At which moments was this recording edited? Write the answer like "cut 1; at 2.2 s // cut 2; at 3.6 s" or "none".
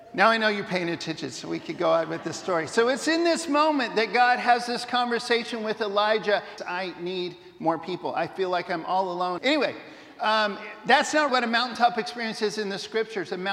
cut 1; at 6.6 s // cut 2; at 9.4 s // cut 3; at 11.3 s

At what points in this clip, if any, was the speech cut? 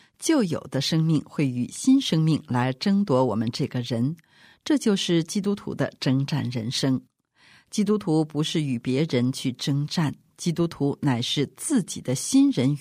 none

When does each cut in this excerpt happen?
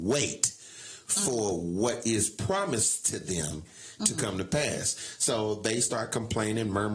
none

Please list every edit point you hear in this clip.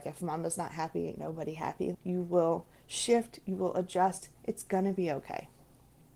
cut 1; at 1.9 s

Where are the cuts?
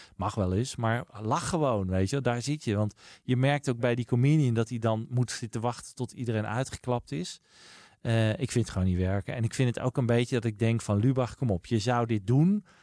none

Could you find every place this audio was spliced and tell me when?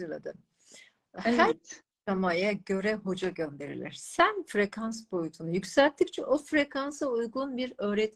none

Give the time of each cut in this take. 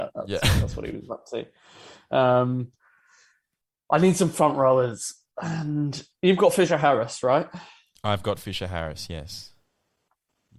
none

